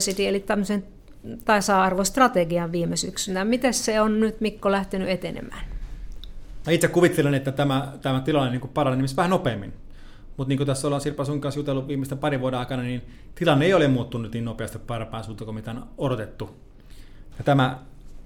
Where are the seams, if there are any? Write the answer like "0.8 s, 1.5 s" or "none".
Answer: 6.6 s, 17.3 s